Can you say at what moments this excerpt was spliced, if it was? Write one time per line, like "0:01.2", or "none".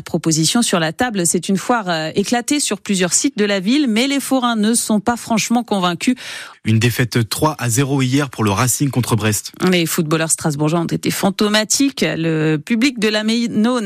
0:06.5